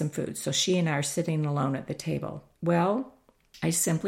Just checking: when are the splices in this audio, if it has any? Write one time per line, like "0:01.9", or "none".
0:02.5

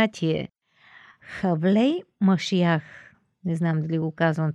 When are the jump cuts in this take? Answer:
none

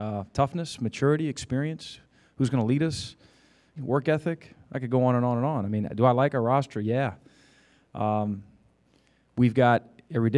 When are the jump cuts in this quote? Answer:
0:03.8

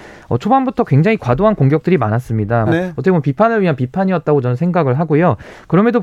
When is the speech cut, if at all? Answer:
0:02.7

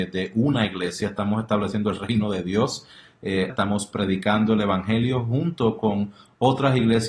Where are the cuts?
0:03.5

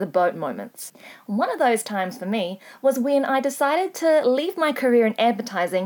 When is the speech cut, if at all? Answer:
none

